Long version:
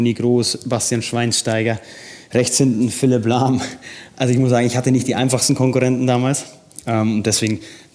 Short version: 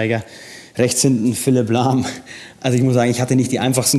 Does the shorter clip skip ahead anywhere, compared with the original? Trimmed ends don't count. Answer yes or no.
no